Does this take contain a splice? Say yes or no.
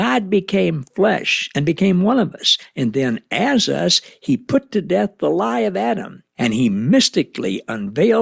no